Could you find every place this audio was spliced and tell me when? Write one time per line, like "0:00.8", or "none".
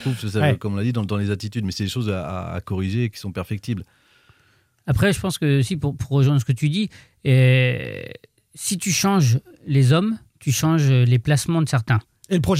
0:10.3